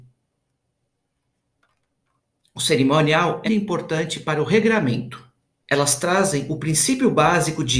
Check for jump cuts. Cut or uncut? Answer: cut